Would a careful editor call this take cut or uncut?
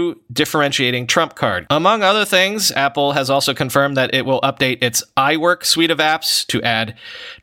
cut